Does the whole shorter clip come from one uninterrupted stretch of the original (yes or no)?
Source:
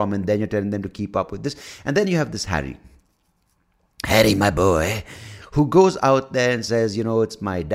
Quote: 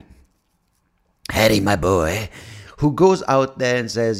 yes